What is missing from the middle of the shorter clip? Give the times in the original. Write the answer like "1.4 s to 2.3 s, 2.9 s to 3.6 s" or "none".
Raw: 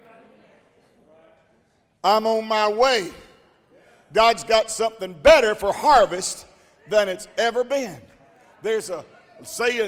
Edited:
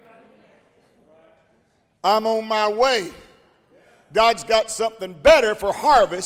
none